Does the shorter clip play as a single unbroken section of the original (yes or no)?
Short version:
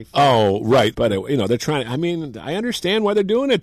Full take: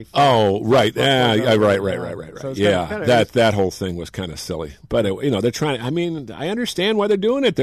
no